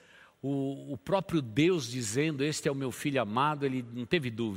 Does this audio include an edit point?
no; 0 cuts

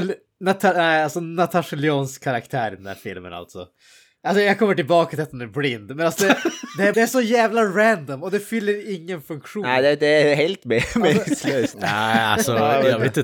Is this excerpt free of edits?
no; 2 cuts; at 6.9 s, 11.7 s

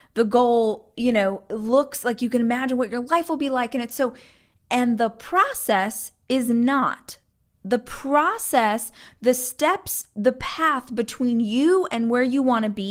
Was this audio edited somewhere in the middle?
no; 0 cuts

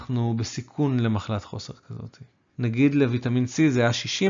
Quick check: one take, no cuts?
no; 1 cut; at 2.5 s

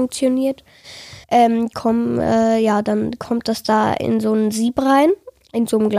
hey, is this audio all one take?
no; 1 cut; at 1.2 s

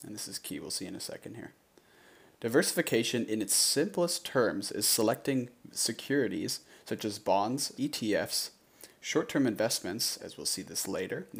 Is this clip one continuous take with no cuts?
no; 2 cuts; at 7.7 s, 10.2 s

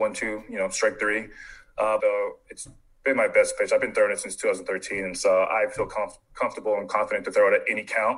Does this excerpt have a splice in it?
yes; 1 cut; at 2.0 s

